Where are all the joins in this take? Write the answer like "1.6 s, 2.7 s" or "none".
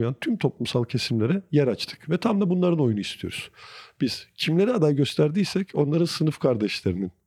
none